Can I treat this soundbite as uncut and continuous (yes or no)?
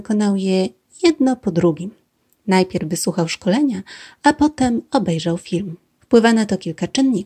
no